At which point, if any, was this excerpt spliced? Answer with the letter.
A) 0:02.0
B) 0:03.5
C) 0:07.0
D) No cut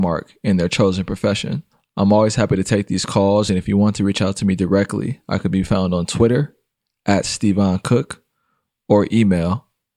D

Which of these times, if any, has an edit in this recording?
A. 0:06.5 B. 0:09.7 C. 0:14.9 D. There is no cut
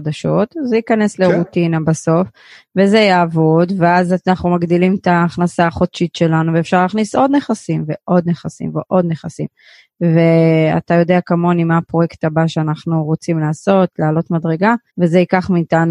C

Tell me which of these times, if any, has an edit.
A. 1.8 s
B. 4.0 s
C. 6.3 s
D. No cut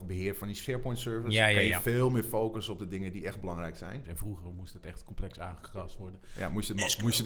B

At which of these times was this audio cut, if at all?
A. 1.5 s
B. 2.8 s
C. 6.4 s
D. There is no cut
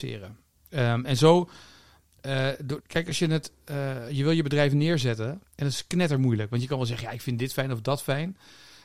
B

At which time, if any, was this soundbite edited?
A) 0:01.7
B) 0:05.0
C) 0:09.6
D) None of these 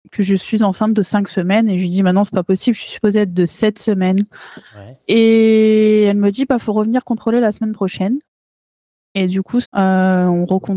C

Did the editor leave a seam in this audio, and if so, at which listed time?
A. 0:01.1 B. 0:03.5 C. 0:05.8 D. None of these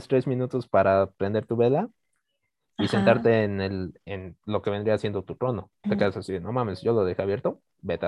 C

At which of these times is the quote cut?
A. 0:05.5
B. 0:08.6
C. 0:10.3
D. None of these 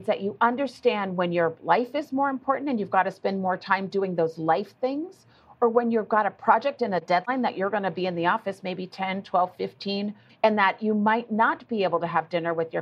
C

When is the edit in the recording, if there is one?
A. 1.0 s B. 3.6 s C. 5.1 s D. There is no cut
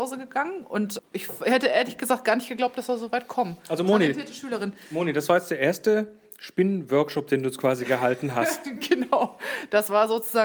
A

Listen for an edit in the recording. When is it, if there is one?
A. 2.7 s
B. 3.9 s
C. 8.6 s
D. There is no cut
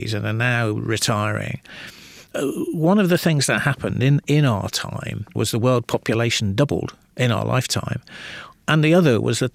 D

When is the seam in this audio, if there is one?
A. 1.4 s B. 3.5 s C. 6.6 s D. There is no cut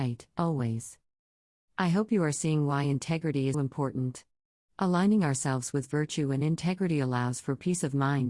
B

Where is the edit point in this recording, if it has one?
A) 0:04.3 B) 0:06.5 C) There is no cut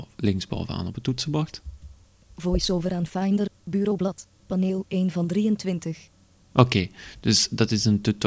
A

